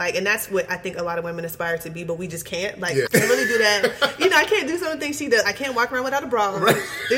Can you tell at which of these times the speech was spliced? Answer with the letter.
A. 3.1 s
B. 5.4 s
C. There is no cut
A